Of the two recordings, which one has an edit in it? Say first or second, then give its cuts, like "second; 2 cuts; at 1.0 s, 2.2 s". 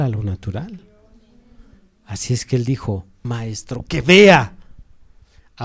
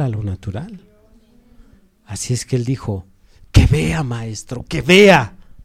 first; 1 cut; at 3.2 s